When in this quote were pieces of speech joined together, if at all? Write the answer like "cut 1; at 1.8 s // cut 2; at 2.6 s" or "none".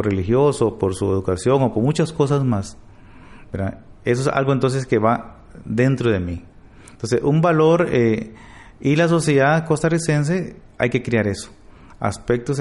none